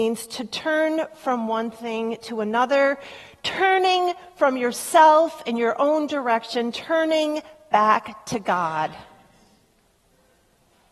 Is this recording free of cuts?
yes; 0 cuts

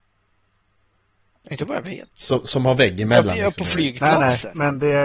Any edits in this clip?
no; 0 cuts

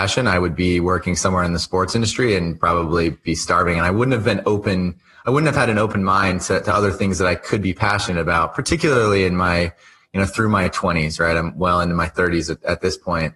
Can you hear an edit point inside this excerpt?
no; 0 cuts

